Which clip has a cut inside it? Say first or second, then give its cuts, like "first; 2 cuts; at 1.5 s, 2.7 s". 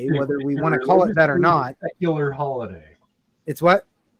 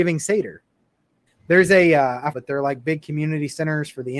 second; 2 cuts; at 1.3 s, 2.3 s